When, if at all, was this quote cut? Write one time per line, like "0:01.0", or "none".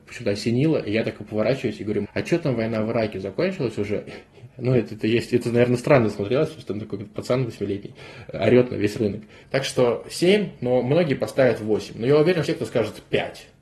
0:02.0
0:09.4
0:12.5